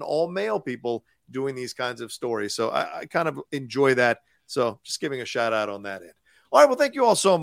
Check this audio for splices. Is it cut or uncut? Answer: uncut